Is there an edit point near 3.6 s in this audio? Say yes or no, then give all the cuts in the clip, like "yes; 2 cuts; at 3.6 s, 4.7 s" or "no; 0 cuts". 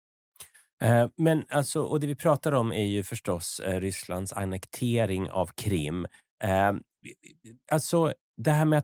no; 0 cuts